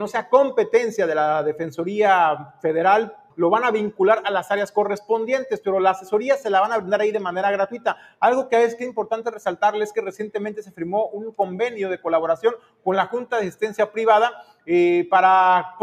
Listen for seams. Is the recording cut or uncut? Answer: cut